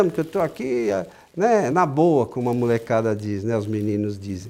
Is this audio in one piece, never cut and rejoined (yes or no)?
yes